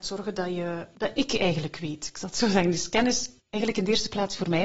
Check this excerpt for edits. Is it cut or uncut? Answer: cut